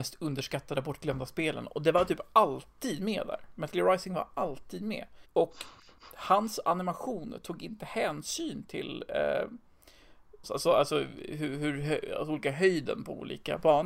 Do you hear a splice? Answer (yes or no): yes